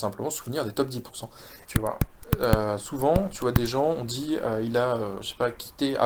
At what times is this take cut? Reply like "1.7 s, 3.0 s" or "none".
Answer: 1.7 s